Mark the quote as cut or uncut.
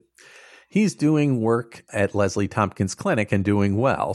cut